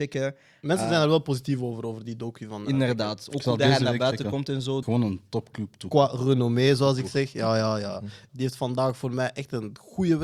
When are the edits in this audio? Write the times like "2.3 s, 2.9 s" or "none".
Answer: 4.8 s, 8.3 s